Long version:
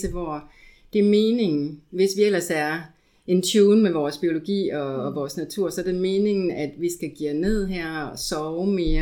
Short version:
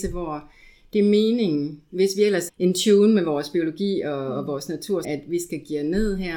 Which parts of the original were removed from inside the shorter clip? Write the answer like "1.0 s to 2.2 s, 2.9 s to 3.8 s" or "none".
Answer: 2.5 s to 3.2 s, 5.7 s to 6.5 s